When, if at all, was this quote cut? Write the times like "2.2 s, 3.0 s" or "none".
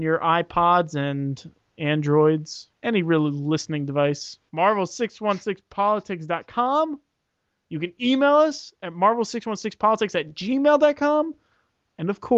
2.7 s

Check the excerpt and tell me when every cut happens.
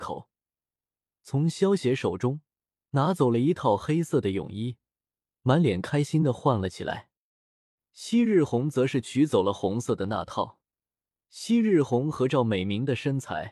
11.1 s

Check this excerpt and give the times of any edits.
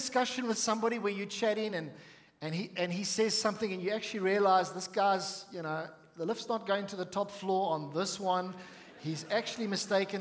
none

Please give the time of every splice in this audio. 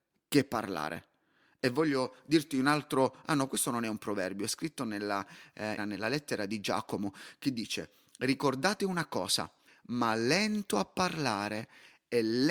5.8 s, 9.7 s

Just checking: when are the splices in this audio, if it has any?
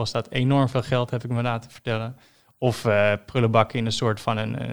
none

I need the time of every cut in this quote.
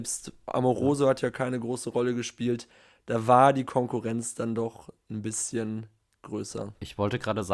none

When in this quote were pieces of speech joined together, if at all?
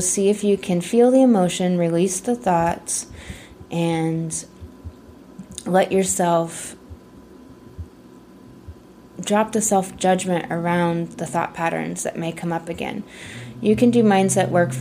none

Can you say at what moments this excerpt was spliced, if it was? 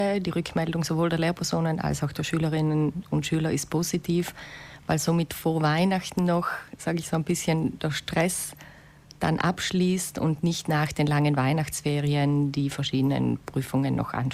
none

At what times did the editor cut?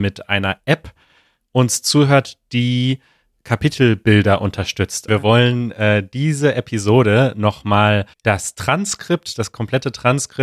5.1 s, 8.1 s

